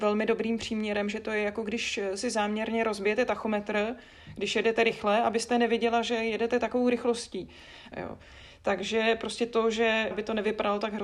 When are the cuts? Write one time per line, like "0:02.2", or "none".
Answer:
0:07.9
0:10.1

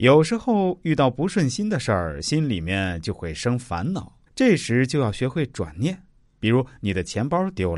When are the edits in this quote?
0:04.3

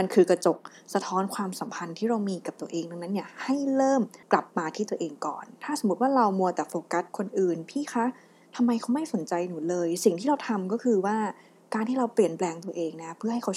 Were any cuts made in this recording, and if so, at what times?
0:04.2

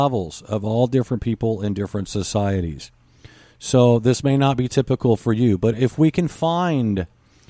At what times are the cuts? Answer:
none

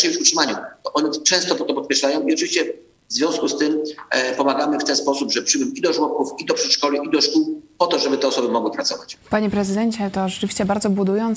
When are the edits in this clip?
0:09.2

